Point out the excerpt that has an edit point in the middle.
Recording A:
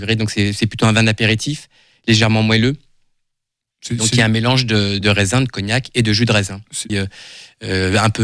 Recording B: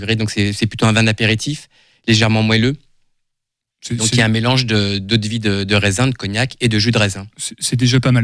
A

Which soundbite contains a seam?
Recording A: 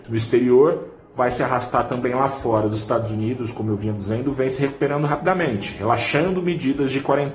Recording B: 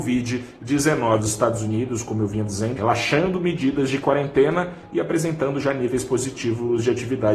B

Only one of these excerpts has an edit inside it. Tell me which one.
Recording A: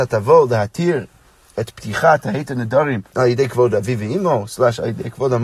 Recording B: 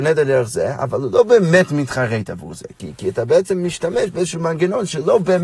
A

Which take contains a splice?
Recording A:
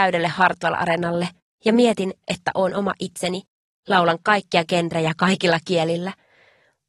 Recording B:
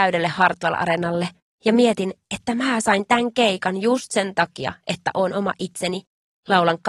A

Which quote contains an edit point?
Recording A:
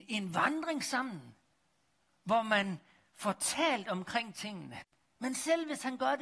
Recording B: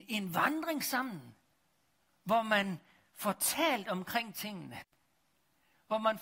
A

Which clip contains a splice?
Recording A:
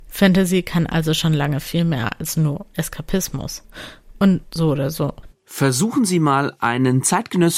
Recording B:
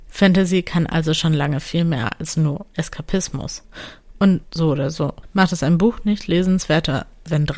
A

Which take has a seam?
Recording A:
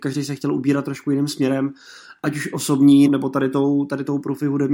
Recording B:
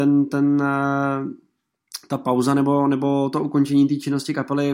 A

